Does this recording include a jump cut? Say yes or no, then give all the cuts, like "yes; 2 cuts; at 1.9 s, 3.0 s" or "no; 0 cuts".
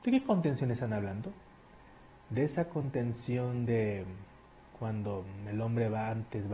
no; 0 cuts